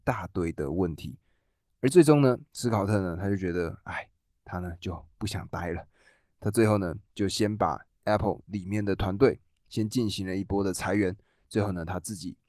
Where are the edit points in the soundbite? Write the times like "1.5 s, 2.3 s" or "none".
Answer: none